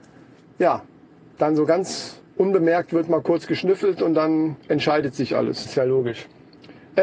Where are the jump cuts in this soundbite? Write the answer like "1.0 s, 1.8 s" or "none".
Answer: 2.3 s, 5.6 s